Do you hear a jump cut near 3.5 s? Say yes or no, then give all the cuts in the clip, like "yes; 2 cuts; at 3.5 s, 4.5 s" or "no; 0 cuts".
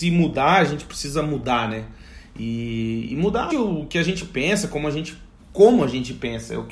yes; 1 cut; at 3.5 s